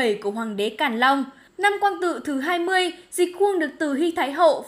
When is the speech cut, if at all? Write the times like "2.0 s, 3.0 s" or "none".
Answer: 1.5 s